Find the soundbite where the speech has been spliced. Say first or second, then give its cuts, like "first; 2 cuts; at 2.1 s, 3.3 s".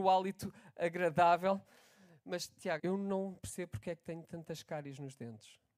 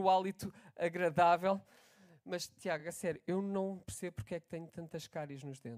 first; 1 cut; at 2.8 s